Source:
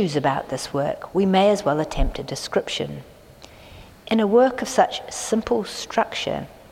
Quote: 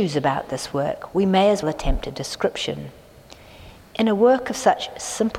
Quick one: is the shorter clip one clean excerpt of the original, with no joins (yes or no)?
no